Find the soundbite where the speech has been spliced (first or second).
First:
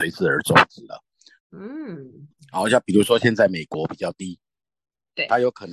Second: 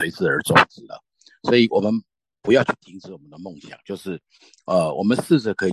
first